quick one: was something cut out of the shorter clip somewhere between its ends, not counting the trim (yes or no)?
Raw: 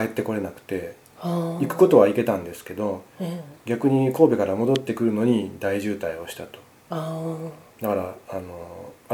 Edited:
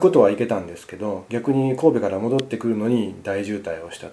yes